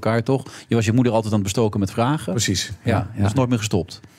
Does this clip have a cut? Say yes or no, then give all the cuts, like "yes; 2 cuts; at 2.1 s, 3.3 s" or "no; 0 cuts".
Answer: no; 0 cuts